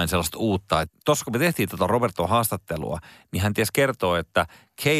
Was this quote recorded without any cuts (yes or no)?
yes